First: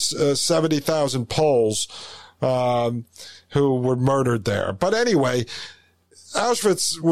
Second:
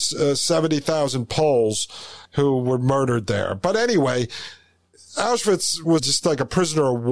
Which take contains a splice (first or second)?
second